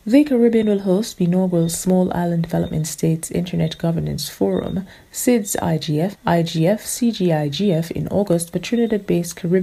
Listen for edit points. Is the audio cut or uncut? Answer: cut